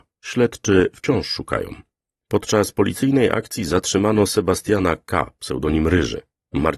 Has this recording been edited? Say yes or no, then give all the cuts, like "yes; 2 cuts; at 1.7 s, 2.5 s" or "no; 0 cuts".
no; 0 cuts